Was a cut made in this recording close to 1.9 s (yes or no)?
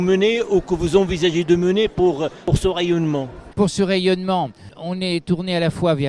no